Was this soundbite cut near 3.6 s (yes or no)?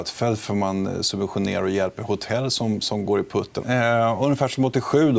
yes